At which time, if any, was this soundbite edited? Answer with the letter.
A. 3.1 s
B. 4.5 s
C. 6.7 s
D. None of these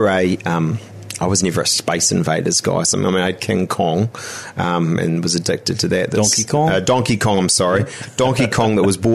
D